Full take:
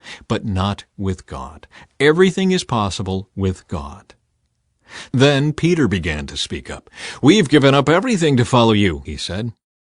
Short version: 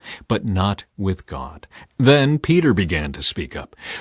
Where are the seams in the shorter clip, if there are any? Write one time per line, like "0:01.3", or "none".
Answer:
0:02.0